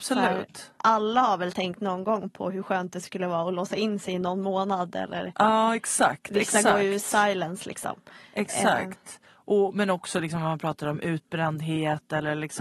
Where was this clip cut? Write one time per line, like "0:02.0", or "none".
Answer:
none